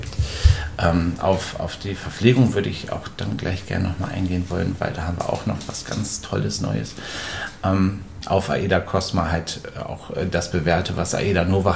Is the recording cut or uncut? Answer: cut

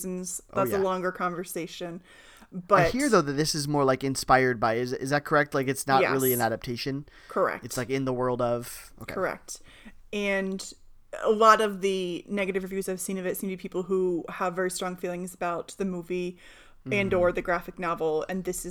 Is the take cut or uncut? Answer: uncut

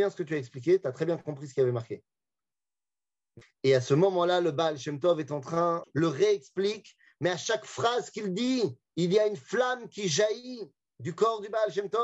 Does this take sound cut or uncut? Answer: cut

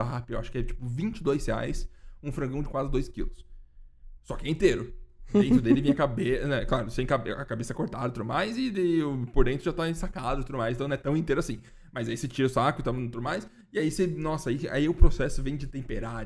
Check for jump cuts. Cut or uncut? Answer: uncut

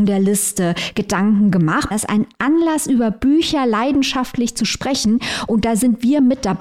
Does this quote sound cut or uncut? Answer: cut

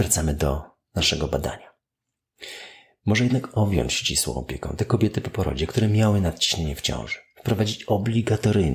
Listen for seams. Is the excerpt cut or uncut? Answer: uncut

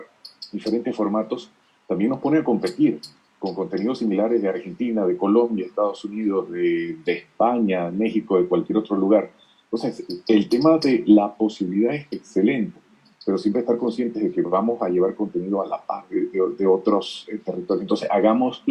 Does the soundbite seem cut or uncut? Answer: uncut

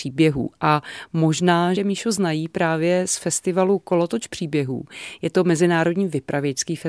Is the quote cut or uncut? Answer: cut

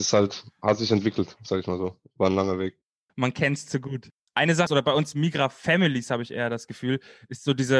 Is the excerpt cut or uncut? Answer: cut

